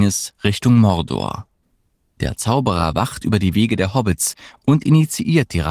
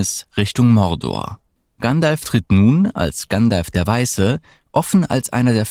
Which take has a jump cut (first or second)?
second